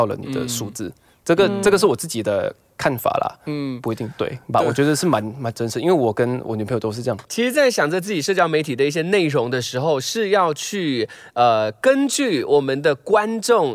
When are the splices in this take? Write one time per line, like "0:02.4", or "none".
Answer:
none